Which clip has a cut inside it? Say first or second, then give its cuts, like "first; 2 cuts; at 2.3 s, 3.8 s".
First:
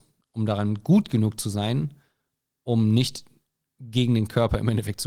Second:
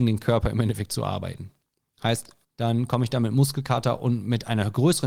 second; 1 cut; at 2.4 s